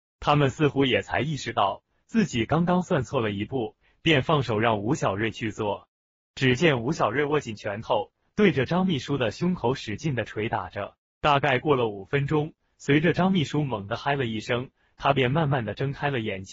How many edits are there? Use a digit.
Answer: 1